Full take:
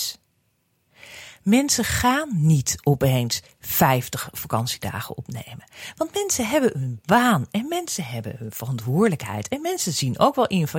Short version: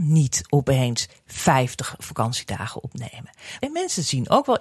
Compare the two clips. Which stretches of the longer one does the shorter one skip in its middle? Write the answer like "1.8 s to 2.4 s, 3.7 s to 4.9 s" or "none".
5.9 s to 9.5 s